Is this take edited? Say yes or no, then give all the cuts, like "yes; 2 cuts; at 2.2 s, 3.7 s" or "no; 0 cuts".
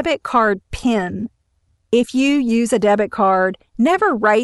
no; 0 cuts